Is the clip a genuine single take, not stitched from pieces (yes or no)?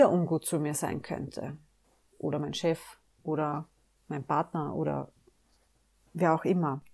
yes